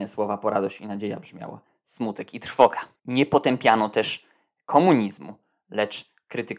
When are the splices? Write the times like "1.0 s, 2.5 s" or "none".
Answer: 3.0 s